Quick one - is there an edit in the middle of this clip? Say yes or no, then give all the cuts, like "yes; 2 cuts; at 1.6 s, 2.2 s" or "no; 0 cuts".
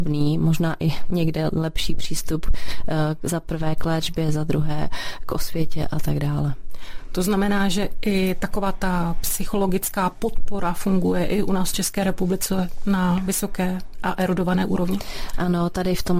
no; 0 cuts